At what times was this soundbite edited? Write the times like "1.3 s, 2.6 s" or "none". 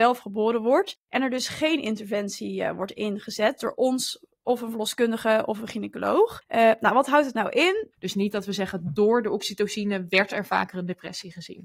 7.9 s